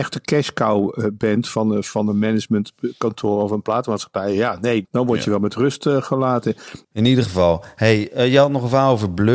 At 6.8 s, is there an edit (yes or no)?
yes